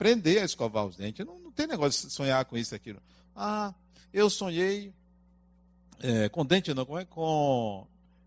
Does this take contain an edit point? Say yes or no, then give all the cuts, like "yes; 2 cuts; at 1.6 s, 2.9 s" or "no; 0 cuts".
no; 0 cuts